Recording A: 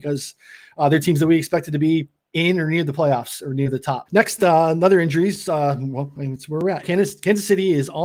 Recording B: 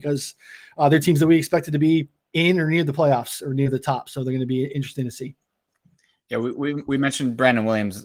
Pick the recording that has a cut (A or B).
A